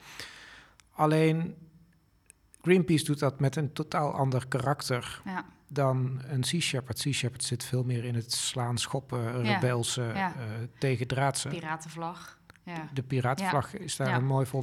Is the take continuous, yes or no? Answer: yes